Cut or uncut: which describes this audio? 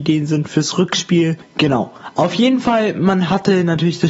uncut